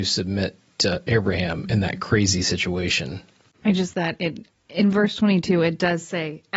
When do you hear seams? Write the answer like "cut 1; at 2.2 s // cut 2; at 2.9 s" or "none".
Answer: cut 1; at 3.9 s